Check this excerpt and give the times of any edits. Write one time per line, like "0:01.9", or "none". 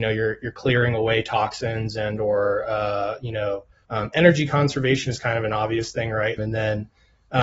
0:03.8
0:06.4